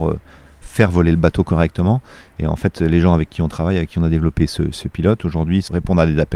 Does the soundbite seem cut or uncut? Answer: uncut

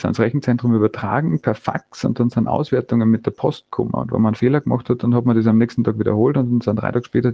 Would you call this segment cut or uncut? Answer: uncut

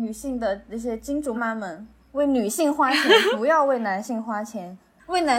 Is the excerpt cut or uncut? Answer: cut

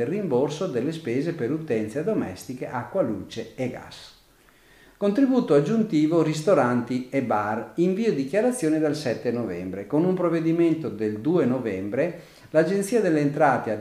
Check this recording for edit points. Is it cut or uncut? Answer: uncut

